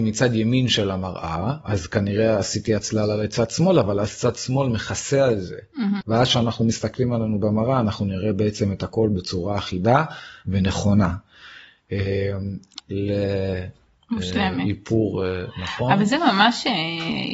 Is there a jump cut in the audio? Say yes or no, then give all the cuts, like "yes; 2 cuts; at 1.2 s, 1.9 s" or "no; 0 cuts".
yes; 2 cuts; at 6.0 s, 12.8 s